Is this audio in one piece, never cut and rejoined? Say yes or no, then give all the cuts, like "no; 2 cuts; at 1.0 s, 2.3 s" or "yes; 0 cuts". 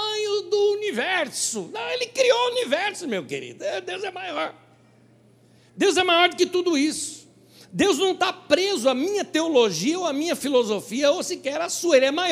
yes; 0 cuts